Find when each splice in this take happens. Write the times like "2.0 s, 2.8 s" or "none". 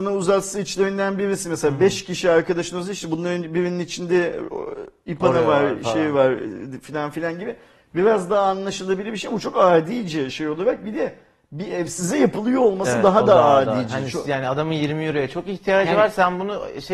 none